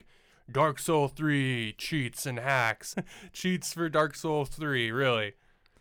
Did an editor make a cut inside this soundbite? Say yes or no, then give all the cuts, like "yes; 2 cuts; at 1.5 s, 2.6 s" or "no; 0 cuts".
yes; 1 cut; at 2.9 s